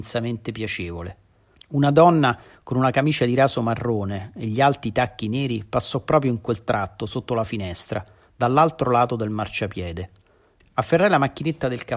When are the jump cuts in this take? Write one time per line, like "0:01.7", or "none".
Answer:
0:01.5
0:10.6